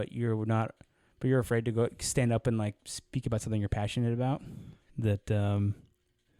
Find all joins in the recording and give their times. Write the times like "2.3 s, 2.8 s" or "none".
4.9 s